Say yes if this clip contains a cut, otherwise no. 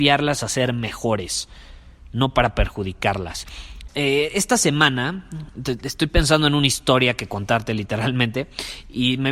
yes